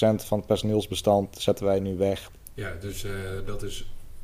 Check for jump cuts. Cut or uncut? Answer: cut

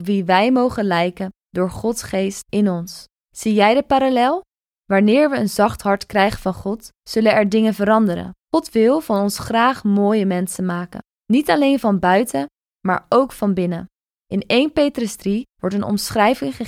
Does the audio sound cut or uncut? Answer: uncut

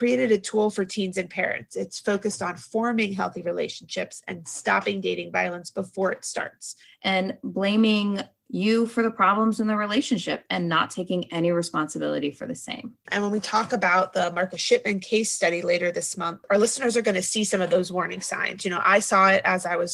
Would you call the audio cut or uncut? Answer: cut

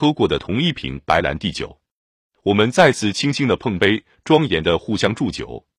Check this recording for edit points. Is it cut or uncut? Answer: uncut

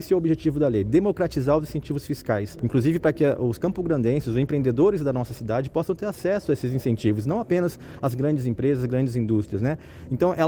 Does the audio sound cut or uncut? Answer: uncut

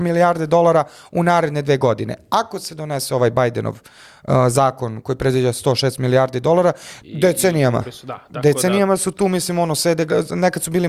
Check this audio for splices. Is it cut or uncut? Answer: cut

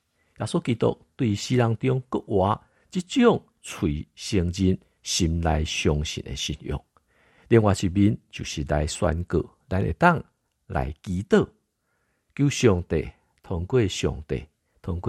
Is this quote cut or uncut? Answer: uncut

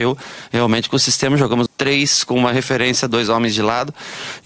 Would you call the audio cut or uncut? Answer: cut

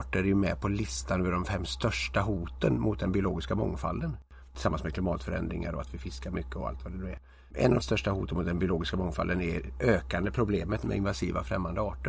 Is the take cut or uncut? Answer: uncut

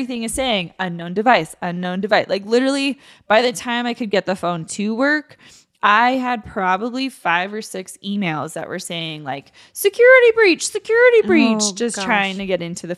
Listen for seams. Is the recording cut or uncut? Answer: uncut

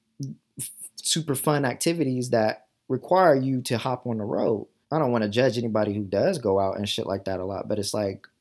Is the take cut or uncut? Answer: cut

